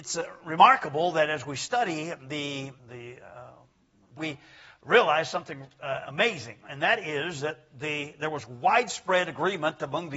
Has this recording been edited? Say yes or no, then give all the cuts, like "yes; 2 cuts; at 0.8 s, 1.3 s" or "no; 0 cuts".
yes; 2 cuts; at 2.8 s, 4.2 s